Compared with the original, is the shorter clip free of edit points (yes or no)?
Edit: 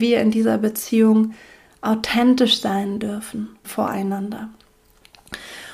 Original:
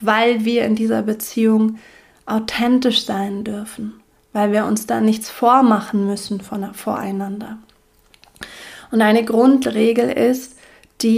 no